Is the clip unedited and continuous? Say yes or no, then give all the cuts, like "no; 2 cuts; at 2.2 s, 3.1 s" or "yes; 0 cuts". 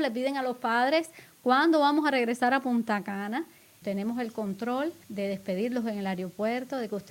no; 2 cuts; at 3.8 s, 5.0 s